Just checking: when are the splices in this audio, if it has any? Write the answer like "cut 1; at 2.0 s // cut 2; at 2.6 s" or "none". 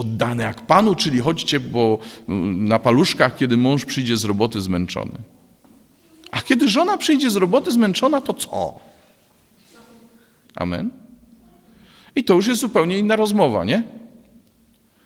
cut 1; at 10.4 s